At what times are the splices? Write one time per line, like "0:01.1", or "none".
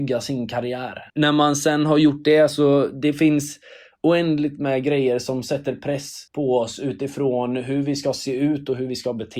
0:01.1
0:06.3